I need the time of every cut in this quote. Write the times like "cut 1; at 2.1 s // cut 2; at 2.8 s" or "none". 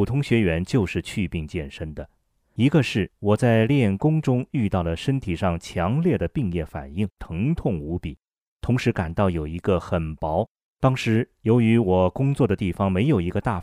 cut 1; at 7.2 s // cut 2; at 10.7 s